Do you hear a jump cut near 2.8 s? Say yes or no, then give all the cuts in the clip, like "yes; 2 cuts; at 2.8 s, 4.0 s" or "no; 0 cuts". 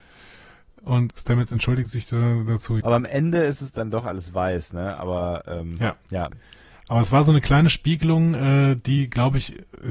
yes; 2 cuts; at 1.1 s, 2.8 s